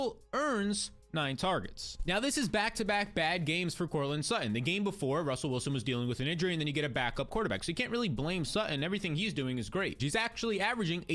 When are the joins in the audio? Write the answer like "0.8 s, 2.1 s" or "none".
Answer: 10.0 s

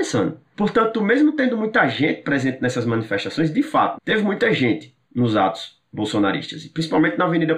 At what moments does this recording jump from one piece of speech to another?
3.9 s, 5.0 s

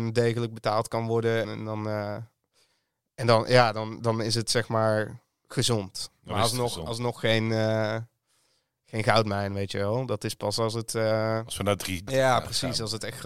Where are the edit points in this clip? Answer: 1.4 s, 12.1 s

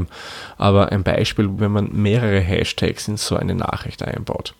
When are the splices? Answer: 1.6 s

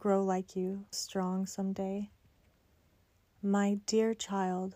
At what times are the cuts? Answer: 0.9 s

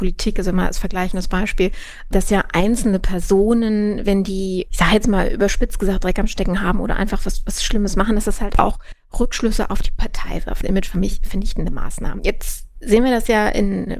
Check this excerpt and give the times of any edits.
10.6 s

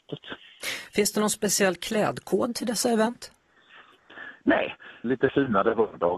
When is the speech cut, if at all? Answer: 5.0 s

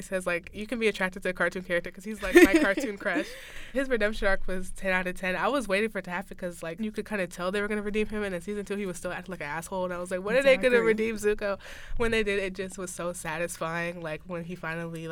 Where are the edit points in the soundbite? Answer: 3.7 s, 6.8 s

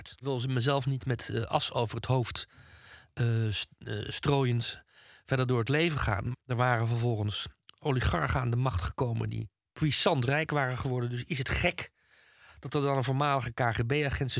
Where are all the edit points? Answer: 6.3 s

